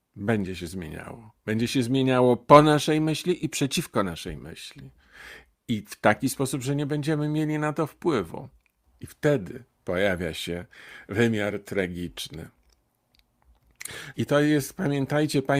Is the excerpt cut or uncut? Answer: cut